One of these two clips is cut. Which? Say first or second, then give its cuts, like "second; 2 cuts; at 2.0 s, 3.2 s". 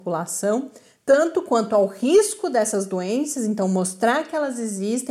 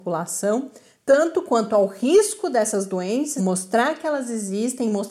second; 1 cut; at 3.4 s